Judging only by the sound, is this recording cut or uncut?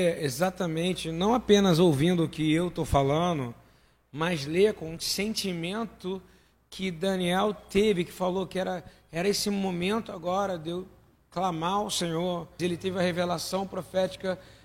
cut